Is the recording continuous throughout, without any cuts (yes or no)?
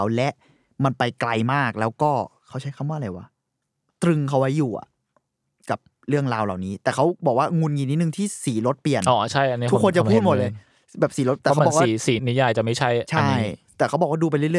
no